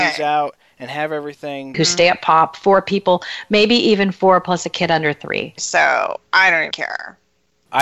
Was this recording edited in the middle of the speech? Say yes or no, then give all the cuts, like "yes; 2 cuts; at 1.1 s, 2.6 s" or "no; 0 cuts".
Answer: yes; 3 cuts; at 1.7 s, 5.6 s, 6.7 s